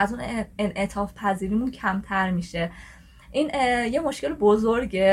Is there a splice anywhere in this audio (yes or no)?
no